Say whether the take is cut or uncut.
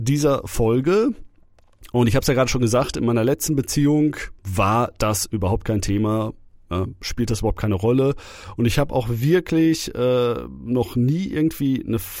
cut